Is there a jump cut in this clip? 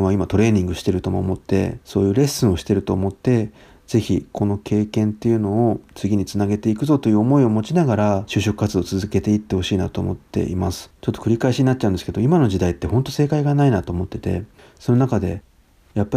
yes; 1 cut; at 11.0 s

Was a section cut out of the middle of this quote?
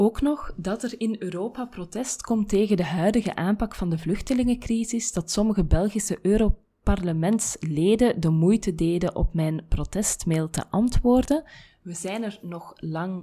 no; 0 cuts

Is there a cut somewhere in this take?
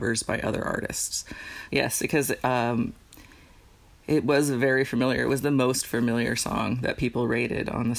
yes; 1 cut; at 1.7 s

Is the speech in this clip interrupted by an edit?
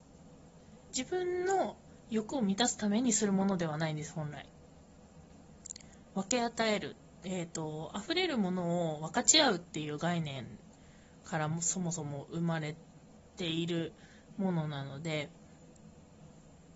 yes; 1 cut; at 2.1 s

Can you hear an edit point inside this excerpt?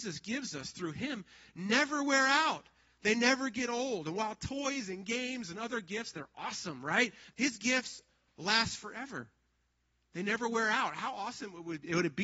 yes; 1 cut; at 7.3 s

